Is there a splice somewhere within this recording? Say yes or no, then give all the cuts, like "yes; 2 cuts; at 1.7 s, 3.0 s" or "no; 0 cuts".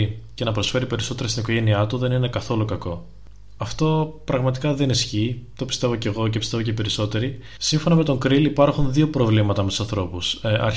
yes; 2 cuts; at 3.6 s, 7.6 s